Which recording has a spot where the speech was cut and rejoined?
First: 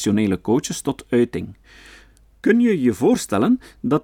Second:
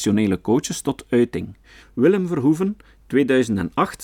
second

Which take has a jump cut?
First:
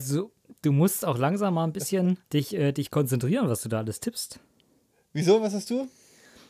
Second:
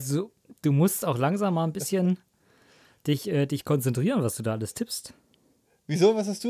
first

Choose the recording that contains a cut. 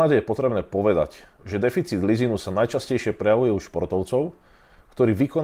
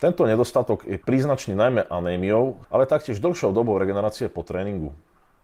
second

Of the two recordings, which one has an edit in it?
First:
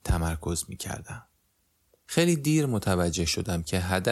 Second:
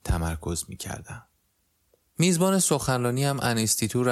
first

